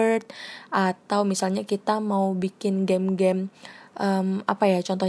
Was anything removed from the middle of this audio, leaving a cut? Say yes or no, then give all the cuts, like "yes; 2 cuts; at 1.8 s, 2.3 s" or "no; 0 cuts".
no; 0 cuts